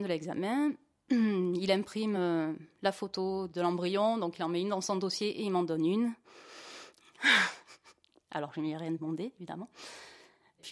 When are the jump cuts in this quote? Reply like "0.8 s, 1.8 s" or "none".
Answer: none